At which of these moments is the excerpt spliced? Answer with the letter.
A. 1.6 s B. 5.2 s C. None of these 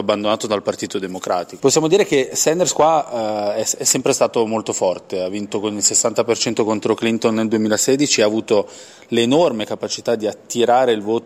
A